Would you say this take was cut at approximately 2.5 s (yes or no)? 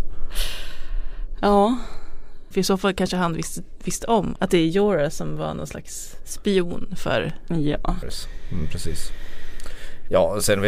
yes